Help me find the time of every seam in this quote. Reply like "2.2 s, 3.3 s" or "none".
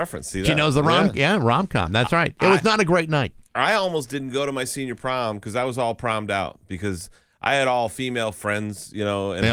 none